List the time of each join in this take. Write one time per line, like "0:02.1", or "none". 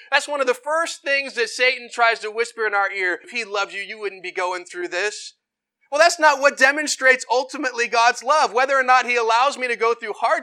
0:03.2